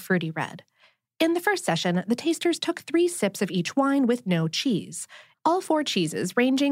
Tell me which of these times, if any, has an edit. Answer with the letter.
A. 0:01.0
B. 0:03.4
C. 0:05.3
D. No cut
C